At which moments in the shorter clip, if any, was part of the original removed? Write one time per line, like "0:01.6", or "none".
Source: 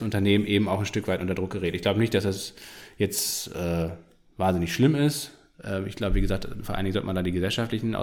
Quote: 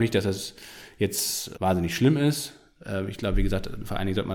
0:01.5